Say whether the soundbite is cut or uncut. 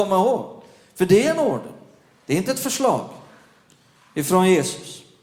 uncut